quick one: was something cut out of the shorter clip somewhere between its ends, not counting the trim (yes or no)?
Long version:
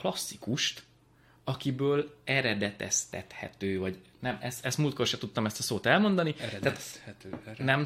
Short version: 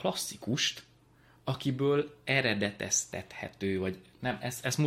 no